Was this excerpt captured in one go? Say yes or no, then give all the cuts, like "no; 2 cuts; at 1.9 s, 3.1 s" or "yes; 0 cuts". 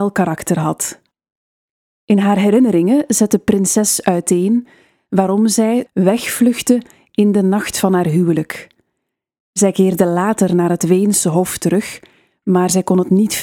no; 1 cut; at 5.9 s